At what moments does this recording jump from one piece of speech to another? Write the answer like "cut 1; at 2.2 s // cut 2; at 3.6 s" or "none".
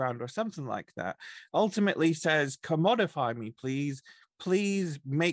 none